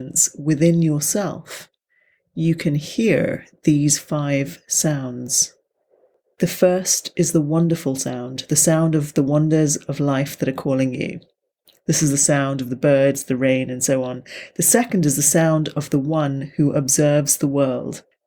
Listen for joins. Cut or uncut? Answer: uncut